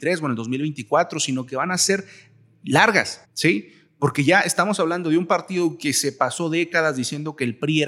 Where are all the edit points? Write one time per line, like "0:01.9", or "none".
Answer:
0:03.2

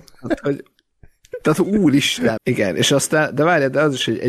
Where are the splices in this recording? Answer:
0:02.4

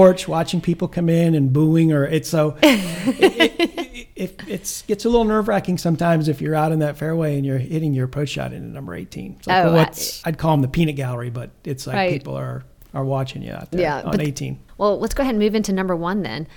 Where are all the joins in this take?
0:10.2
0:12.8
0:14.7

